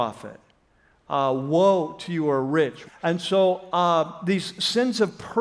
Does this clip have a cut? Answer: yes; 1 cut; at 2.8 s

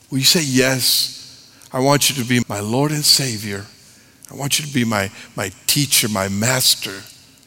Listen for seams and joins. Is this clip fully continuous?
no; 1 cut; at 2.4 s

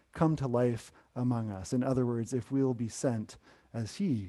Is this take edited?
no; 0 cuts

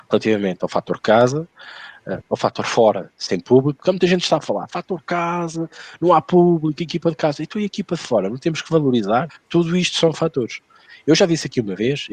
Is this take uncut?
no; 2 cuts; at 2.2 s, 9.3 s

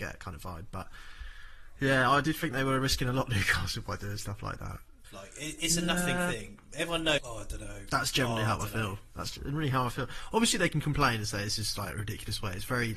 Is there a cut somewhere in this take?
yes; 2 cuts; at 5.0 s, 7.2 s

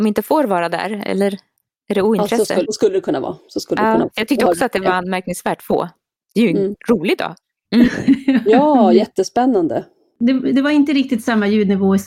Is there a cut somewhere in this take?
yes; 2 cuts; at 2.6 s, 7.6 s

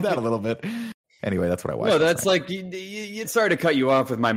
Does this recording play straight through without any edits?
no; 1 cut; at 3.2 s

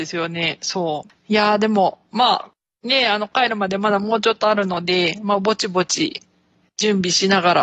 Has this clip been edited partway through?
no; 0 cuts

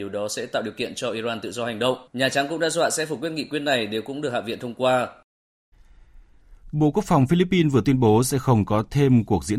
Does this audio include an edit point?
yes; 1 cut; at 2.1 s

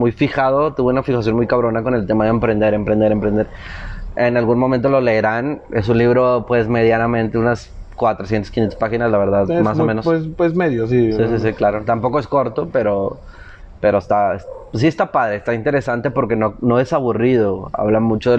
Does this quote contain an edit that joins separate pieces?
no; 0 cuts

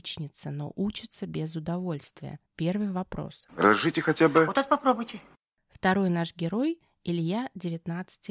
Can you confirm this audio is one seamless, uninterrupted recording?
no; 2 cuts; at 2.5 s, 3.5 s

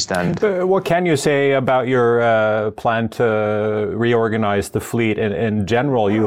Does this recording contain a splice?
no; 0 cuts

